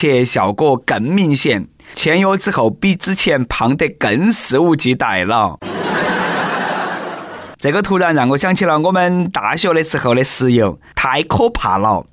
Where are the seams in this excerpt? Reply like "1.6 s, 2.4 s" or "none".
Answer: 10.9 s